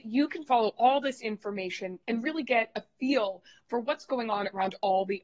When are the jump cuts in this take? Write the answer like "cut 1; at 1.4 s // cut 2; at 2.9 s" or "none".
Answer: cut 1; at 2.0 s